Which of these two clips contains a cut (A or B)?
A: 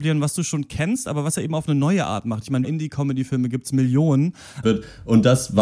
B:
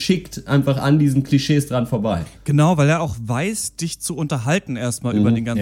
A